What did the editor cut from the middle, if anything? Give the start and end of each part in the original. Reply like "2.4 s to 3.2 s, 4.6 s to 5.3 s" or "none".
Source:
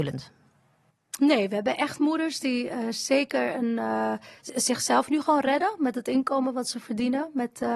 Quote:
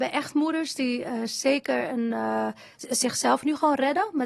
none